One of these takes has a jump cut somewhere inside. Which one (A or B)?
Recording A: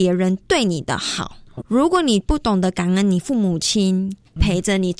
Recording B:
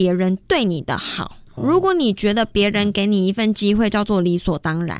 A